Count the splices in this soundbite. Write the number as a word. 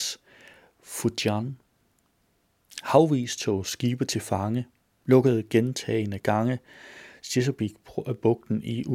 zero